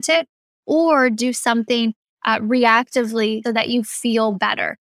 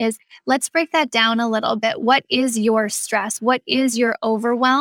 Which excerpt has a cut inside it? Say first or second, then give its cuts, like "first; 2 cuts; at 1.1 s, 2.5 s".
first; 1 cut; at 3.4 s